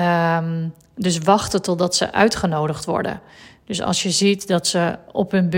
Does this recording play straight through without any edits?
yes; 0 cuts

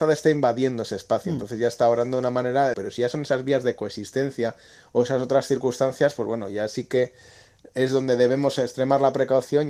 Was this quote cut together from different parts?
yes; 1 cut; at 2.7 s

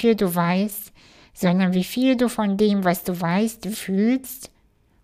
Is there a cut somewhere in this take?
yes; 1 cut; at 3.7 s

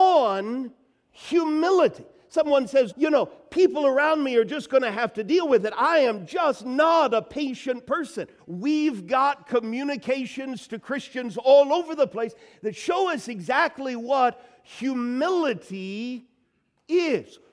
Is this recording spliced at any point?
yes; 2 cuts; at 2.9 s, 8.4 s

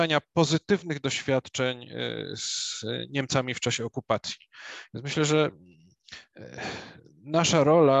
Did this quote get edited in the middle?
yes; 1 cut; at 4.9 s

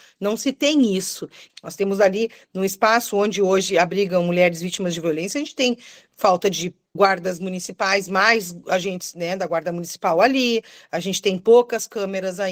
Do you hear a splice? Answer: yes; 1 cut; at 1.5 s

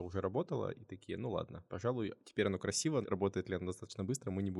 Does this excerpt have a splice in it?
yes; 2 cuts; at 1.7 s, 3.0 s

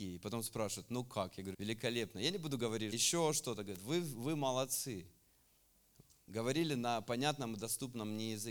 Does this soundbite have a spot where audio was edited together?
yes; 2 cuts; at 1.5 s, 2.9 s

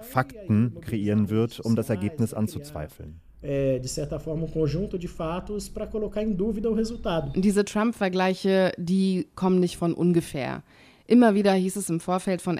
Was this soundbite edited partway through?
no; 0 cuts

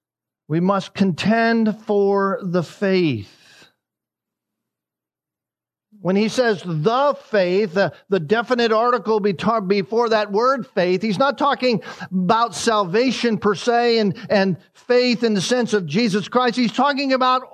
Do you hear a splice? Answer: no; 0 cuts

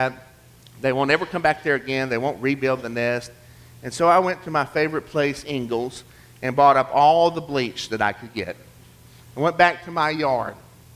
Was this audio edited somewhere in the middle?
no; 0 cuts

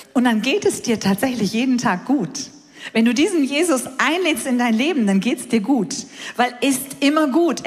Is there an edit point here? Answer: yes; 1 cut; at 6.6 s

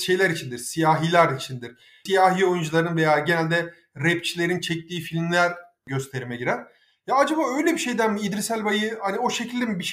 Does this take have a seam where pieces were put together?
no; 0 cuts

